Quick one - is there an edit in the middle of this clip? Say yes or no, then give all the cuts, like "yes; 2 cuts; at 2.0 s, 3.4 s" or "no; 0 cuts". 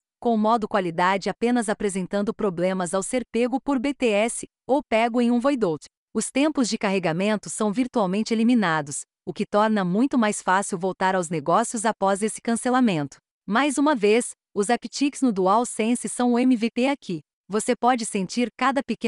no; 0 cuts